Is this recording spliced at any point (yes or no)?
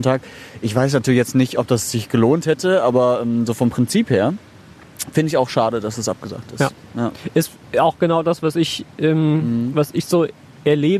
no